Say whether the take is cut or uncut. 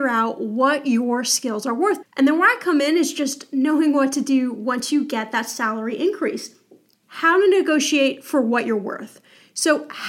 cut